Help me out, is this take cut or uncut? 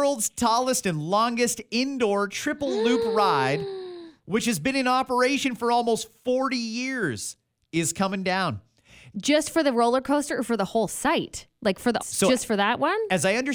cut